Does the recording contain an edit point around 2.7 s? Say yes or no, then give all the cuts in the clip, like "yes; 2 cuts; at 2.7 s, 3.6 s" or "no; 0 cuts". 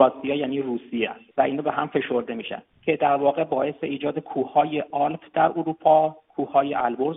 yes; 2 cuts; at 1.3 s, 2.7 s